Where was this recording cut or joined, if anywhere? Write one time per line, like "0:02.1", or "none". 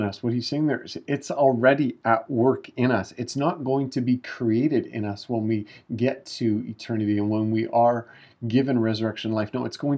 none